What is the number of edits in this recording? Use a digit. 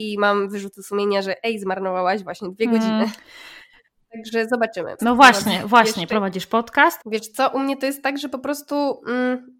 2